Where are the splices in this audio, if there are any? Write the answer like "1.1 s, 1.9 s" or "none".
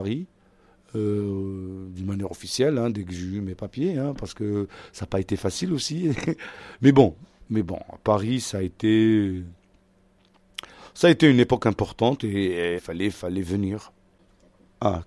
12.8 s